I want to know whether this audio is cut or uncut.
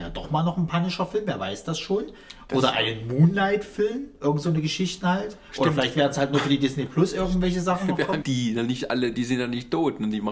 cut